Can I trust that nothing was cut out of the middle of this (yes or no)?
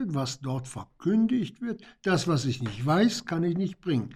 yes